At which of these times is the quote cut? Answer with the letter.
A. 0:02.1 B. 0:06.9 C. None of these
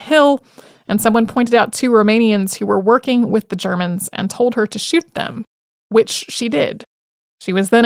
C